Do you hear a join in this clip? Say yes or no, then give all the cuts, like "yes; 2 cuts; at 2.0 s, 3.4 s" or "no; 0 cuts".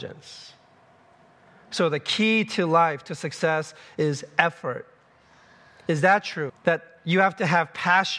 yes; 1 cut; at 6.5 s